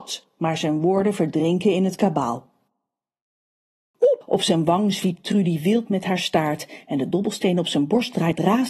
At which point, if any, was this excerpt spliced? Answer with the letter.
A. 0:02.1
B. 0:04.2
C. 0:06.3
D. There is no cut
B